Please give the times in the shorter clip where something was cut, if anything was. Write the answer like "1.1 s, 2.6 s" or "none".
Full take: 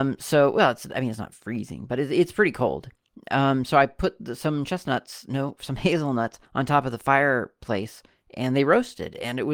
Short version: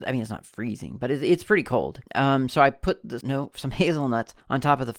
2.1 s, 3.2 s